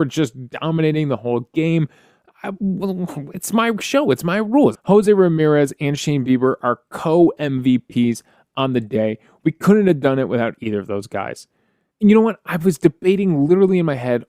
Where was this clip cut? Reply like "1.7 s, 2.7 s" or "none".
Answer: 4.7 s, 11.9 s